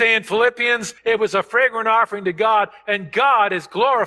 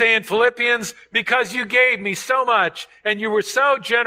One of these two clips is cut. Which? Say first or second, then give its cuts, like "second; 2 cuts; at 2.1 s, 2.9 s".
first; 1 cut; at 1.0 s